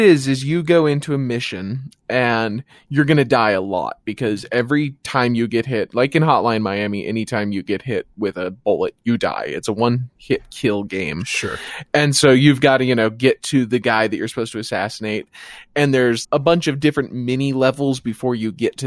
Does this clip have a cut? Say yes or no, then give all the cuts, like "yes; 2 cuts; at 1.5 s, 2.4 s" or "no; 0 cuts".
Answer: yes; 2 cuts; at 10.2 s, 16.2 s